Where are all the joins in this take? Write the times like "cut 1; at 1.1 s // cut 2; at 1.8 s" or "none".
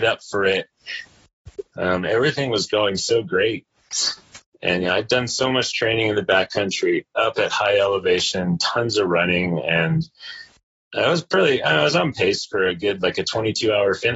cut 1; at 1.7 s